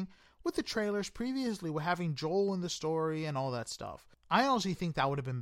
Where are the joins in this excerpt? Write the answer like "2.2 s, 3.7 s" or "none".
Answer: 4.2 s